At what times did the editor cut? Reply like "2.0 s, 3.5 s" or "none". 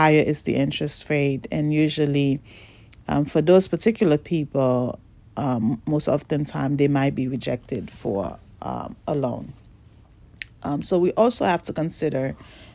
none